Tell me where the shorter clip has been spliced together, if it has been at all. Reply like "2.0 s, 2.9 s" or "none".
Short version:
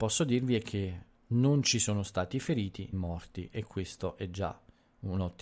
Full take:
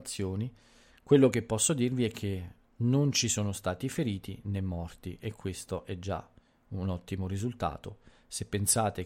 2.9 s